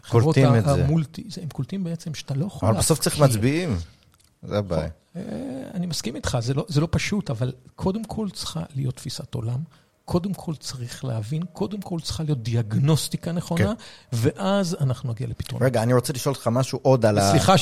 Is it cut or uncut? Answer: uncut